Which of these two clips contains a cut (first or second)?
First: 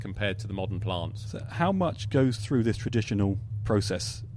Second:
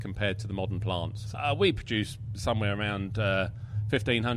second